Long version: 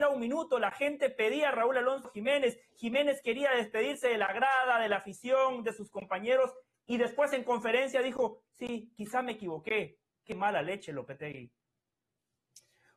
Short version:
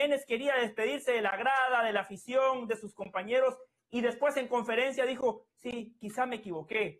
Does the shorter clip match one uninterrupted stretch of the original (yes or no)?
yes